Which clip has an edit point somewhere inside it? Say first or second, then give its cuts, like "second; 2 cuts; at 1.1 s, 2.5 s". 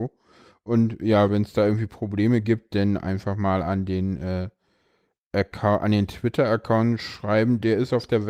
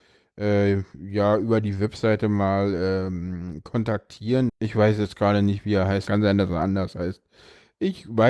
second; 2 cuts; at 4.5 s, 6.1 s